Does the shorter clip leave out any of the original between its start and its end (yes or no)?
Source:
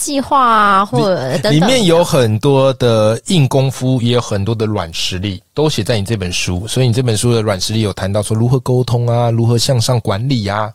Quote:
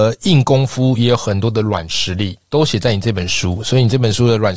no